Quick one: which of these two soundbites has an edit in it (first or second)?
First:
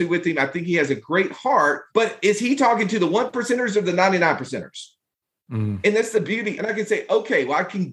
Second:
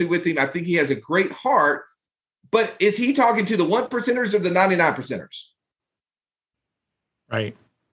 first